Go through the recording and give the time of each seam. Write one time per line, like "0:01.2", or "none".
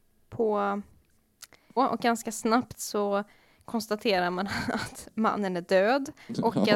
0:01.8